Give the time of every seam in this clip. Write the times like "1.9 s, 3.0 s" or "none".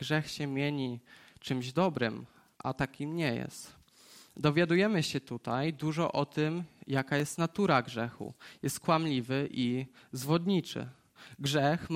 none